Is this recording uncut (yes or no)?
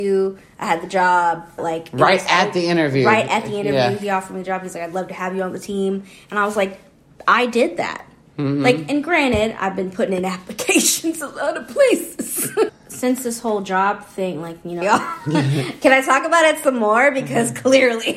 no